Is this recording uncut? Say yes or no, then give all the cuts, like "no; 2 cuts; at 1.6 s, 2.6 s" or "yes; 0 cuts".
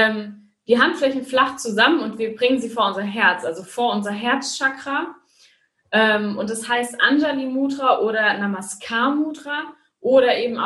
yes; 0 cuts